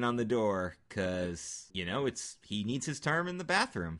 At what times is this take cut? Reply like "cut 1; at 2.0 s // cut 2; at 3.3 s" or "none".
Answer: cut 1; at 1.7 s